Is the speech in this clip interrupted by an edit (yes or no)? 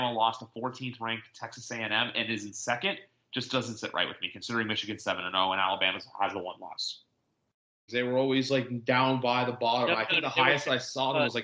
yes